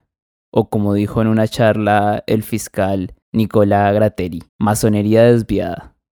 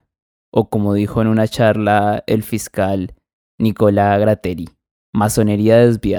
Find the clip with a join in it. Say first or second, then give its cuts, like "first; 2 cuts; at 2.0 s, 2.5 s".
first; 2 cuts; at 3.2 s, 4.5 s